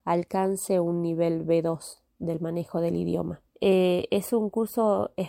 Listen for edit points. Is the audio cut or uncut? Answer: cut